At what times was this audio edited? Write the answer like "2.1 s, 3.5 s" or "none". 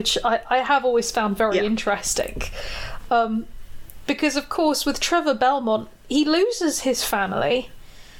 none